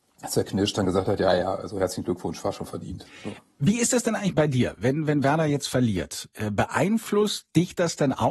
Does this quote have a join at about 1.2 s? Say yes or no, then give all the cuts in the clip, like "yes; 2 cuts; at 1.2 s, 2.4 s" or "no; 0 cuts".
no; 0 cuts